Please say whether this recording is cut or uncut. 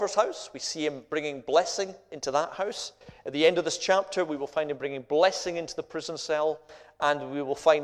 uncut